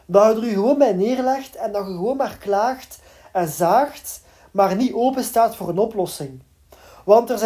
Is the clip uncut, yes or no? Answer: yes